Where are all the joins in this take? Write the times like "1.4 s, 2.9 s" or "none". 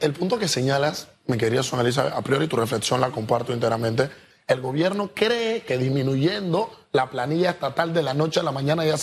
4.3 s